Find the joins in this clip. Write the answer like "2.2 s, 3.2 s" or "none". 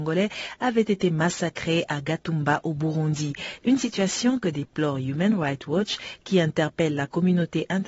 3.6 s